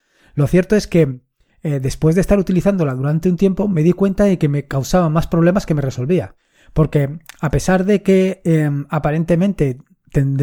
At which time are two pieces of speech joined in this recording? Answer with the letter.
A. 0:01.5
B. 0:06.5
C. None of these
C